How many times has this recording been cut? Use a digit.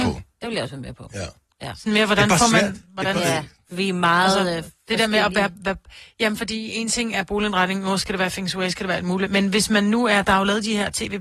1